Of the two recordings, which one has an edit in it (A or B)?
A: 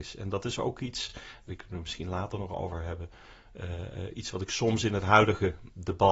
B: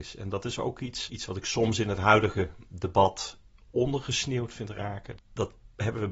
B